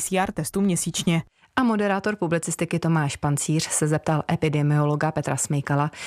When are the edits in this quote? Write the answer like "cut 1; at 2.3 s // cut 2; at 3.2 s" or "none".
none